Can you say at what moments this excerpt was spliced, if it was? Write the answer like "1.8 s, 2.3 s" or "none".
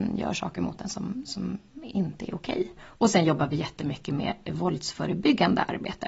2.8 s